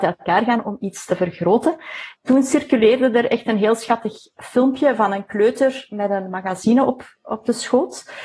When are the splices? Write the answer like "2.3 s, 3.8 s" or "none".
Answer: none

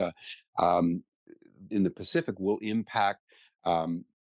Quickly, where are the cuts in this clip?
1.7 s

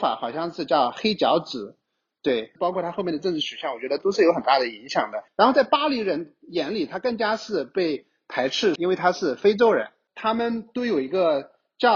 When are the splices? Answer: 2.6 s, 5.3 s, 8.8 s

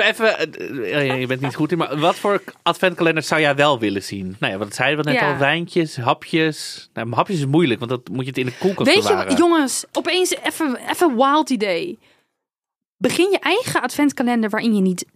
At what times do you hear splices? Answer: none

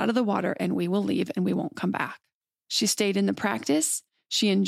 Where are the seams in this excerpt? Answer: 2.6 s

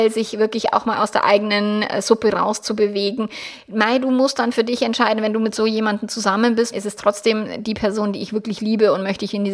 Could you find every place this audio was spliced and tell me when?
6.7 s

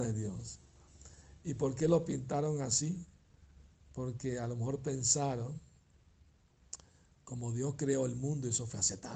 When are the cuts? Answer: none

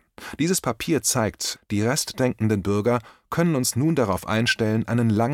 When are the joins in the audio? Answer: 1.6 s

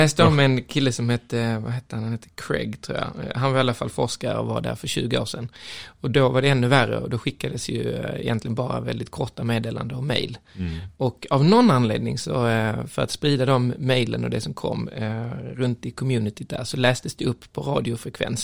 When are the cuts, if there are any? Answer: none

